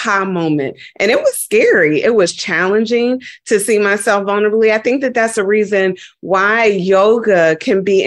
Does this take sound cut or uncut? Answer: uncut